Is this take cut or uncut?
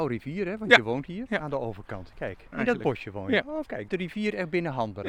cut